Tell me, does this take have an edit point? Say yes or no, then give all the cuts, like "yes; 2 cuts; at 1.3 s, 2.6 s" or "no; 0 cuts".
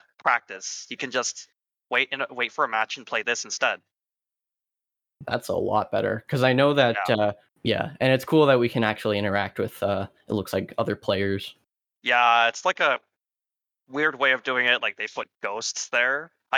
yes; 1 cut; at 7.5 s